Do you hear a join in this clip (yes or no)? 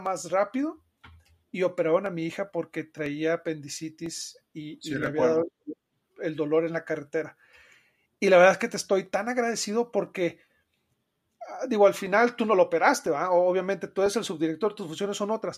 no